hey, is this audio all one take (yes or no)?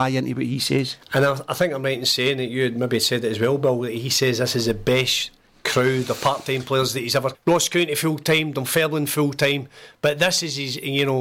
no